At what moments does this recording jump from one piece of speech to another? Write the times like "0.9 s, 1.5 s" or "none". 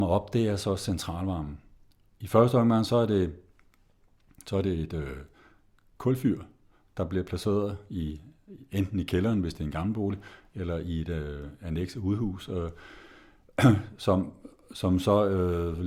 none